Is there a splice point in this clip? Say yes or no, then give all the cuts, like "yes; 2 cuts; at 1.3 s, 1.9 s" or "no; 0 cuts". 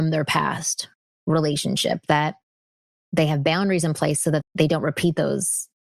yes; 1 cut; at 4.4 s